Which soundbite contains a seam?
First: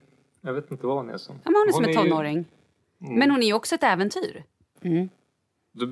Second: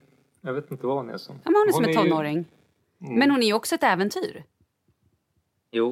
first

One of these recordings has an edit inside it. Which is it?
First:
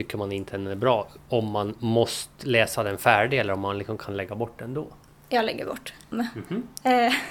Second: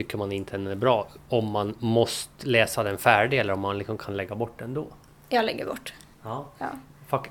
first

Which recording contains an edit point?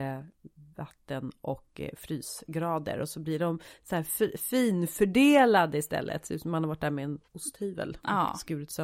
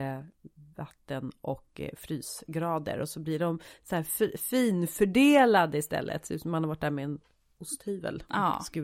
first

